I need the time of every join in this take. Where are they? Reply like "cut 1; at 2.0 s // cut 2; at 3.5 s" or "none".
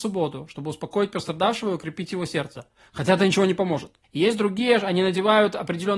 cut 1; at 4.0 s